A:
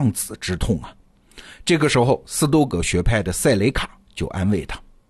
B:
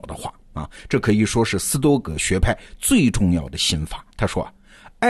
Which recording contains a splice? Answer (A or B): B